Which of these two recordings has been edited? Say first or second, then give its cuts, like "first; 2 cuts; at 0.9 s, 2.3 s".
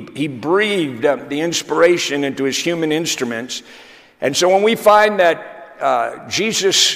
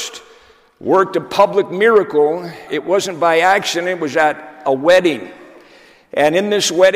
second; 1 cut; at 2.7 s